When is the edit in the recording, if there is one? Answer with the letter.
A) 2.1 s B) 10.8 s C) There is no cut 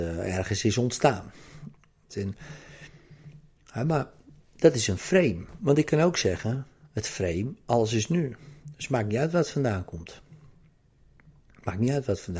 A